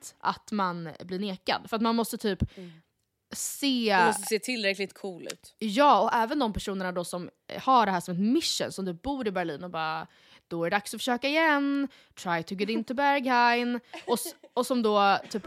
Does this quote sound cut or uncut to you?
uncut